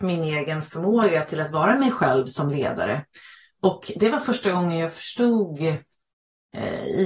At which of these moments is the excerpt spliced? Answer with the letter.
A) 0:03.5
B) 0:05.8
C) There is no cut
C